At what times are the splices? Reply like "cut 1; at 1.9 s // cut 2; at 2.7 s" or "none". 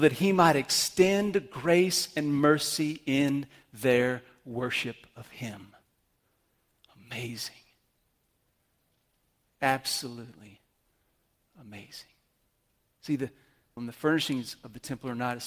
cut 1; at 13.8 s